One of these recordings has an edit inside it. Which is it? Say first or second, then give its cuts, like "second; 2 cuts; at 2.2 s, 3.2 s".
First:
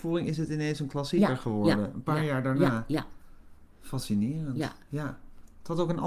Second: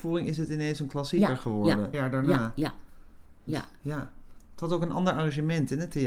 second; 2 cuts; at 1.9 s, 3.5 s